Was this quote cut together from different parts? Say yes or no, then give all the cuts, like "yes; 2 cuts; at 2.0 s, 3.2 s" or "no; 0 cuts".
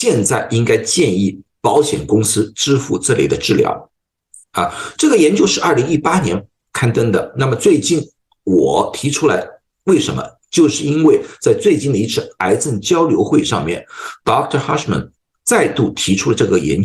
no; 0 cuts